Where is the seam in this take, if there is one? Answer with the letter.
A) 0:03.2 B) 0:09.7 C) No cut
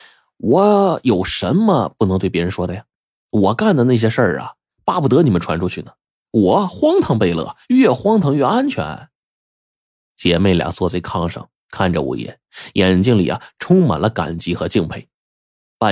C